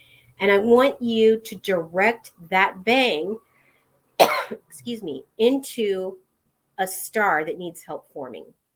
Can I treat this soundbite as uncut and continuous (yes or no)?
yes